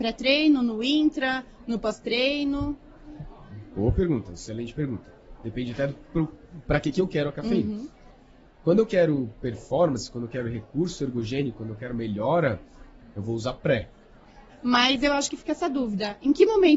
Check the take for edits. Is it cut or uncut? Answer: cut